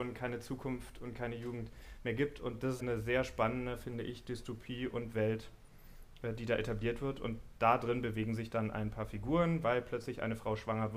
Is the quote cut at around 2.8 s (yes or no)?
yes